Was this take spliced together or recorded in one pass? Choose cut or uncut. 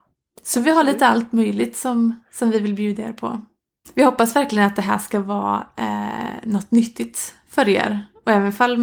cut